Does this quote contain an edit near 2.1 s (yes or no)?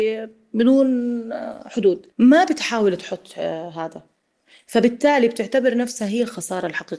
yes